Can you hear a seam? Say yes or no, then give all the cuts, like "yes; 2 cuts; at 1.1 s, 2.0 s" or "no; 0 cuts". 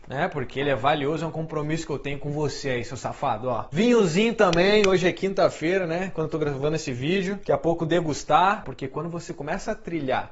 yes; 1 cut; at 8.6 s